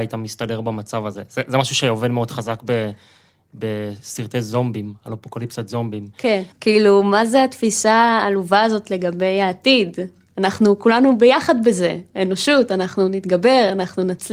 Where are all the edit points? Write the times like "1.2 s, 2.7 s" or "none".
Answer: 6.5 s